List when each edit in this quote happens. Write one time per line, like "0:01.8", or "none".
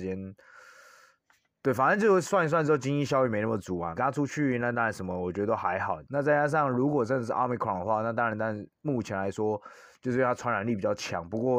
0:03.9
0:06.0

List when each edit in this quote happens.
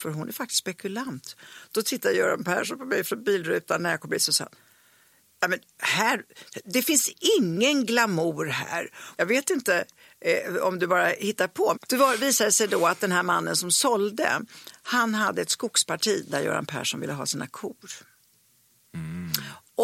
0:09.1
0:11.7

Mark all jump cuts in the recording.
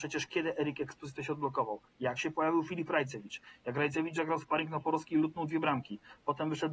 none

